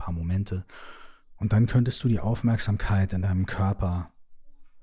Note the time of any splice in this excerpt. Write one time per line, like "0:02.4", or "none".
none